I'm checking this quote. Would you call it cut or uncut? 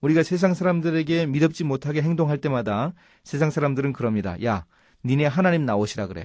uncut